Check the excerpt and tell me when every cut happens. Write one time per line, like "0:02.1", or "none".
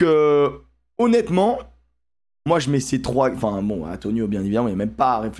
none

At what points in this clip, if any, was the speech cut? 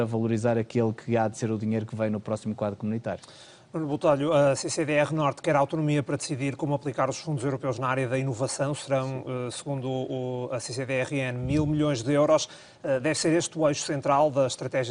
none

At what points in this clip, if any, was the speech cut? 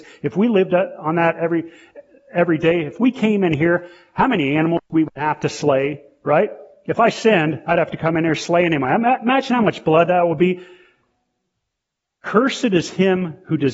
none

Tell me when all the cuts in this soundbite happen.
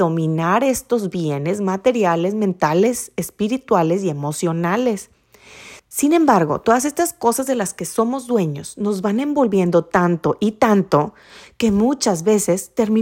0:05.8

